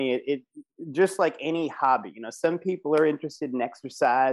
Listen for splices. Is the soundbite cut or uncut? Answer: uncut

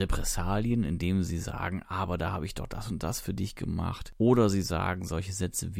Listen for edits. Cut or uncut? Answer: uncut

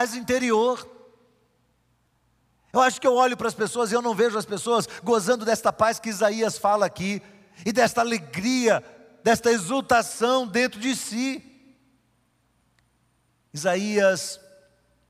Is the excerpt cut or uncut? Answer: uncut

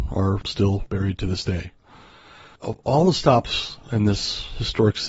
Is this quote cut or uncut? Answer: uncut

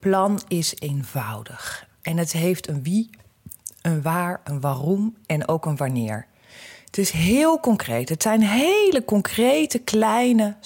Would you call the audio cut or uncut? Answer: uncut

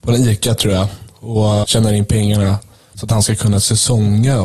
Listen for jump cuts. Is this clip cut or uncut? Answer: cut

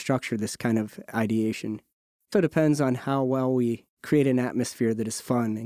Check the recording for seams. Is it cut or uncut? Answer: cut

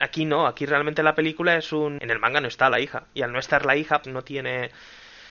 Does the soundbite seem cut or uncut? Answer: cut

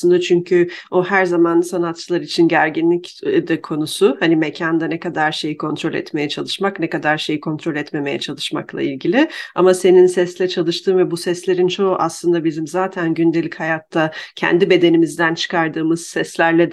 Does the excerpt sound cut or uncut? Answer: uncut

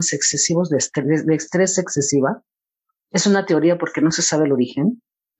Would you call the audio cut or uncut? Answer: uncut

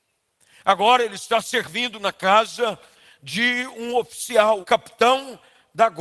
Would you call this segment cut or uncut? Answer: cut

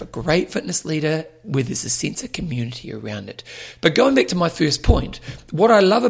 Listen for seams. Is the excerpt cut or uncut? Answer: cut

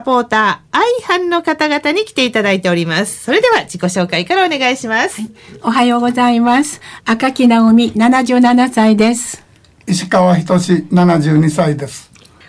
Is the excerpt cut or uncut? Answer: uncut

